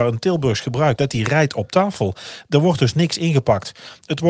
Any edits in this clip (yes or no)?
yes